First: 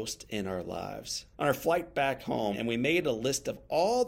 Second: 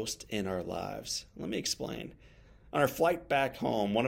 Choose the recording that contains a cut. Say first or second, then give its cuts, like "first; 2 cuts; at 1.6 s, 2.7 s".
first; 2 cuts; at 1.3 s, 2.5 s